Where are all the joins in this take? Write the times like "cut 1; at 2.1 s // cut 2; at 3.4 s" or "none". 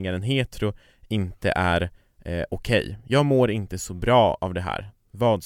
none